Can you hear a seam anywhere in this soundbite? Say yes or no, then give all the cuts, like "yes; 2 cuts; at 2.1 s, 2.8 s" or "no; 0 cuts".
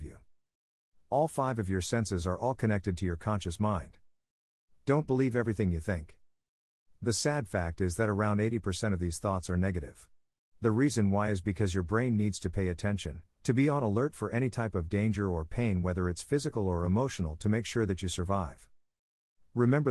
yes; 1 cut; at 7.0 s